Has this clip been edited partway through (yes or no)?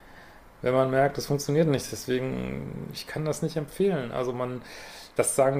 no